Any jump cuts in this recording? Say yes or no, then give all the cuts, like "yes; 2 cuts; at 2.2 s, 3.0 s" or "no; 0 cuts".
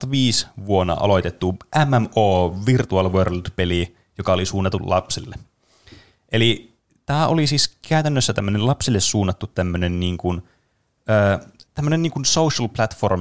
yes; 1 cut; at 11.6 s